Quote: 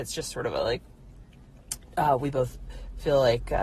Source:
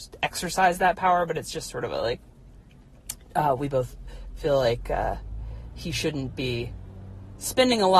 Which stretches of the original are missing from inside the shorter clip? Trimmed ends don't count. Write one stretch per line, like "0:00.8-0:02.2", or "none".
none